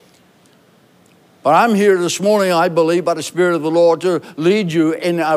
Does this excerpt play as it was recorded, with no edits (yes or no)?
yes